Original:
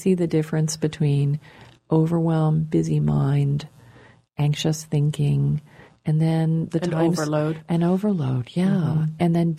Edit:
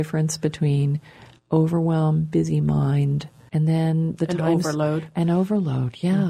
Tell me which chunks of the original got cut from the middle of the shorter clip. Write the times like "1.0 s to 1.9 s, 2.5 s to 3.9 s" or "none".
3.9 s to 6.0 s